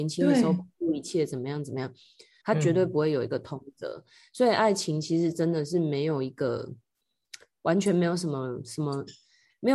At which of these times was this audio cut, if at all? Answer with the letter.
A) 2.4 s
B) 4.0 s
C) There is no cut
A